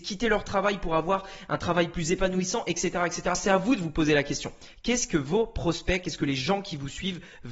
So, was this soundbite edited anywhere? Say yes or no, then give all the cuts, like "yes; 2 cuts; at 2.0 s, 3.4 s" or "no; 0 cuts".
no; 0 cuts